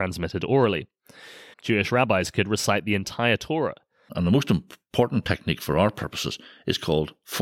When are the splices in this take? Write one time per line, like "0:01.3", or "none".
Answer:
0:01.5
0:04.1